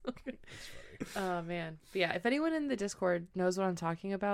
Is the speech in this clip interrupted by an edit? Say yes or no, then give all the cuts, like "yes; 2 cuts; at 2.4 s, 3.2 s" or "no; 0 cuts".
no; 0 cuts